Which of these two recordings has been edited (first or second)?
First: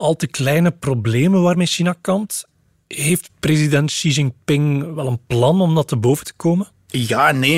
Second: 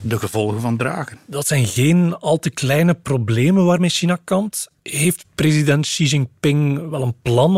second